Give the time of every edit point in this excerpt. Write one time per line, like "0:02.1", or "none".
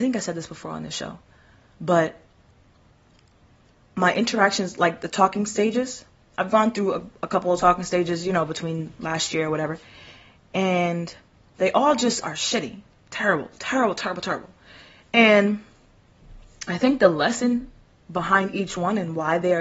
none